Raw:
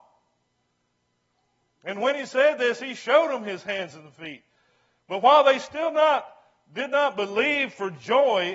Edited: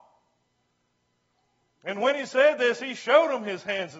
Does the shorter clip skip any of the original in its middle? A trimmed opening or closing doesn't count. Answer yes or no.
no